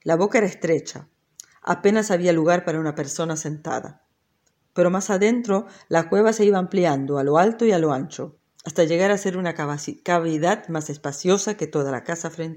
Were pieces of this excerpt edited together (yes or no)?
no